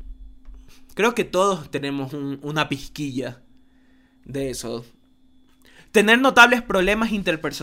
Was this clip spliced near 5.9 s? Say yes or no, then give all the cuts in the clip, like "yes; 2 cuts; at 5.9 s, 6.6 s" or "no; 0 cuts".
no; 0 cuts